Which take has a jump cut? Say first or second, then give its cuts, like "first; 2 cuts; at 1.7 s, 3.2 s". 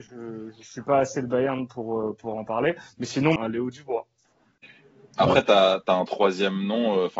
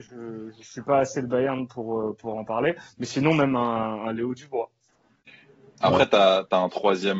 first; 1 cut; at 3.4 s